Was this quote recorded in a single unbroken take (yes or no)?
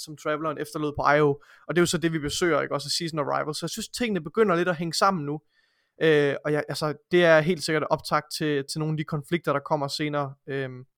yes